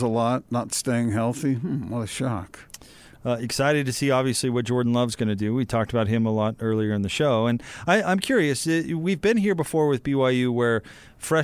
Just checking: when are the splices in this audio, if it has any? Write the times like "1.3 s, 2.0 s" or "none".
none